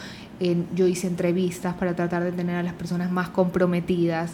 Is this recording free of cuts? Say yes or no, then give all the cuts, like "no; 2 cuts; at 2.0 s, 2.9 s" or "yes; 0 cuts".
yes; 0 cuts